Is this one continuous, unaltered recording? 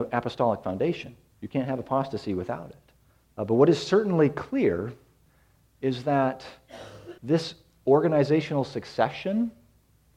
no; 2 cuts; at 3.2 s, 7.2 s

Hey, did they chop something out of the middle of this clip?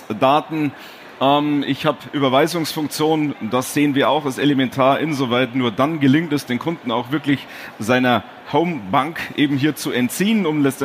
yes; 1 cut; at 8.4 s

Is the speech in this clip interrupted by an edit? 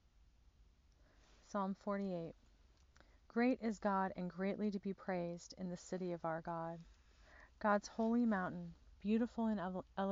no; 0 cuts

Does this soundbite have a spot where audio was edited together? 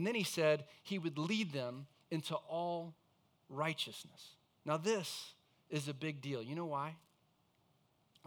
no; 0 cuts

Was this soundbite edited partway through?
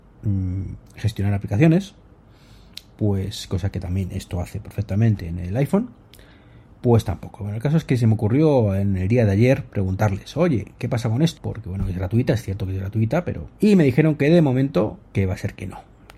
yes; 2 cuts; at 11.4 s, 13.5 s

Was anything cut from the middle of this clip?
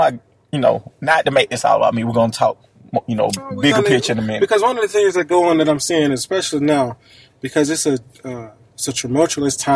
no; 0 cuts

